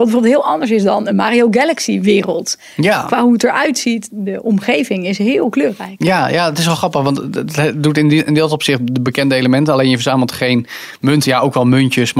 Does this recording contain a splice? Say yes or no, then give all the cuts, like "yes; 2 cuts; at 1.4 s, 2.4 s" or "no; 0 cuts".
yes; 1 cut; at 4.1 s